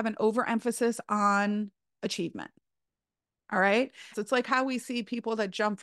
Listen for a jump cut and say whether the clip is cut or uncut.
cut